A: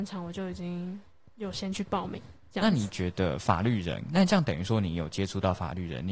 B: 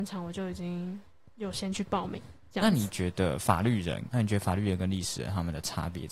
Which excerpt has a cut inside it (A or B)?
B